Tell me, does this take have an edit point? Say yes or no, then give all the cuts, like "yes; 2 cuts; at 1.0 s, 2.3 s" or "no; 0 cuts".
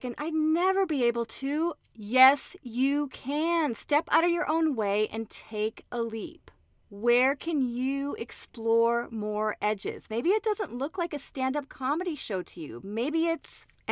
no; 0 cuts